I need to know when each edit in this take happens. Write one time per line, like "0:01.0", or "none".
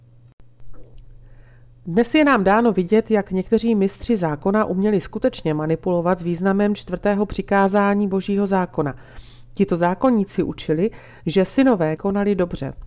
0:12.0